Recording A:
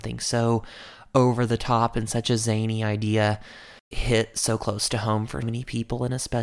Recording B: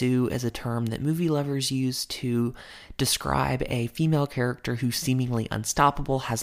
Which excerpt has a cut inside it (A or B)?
A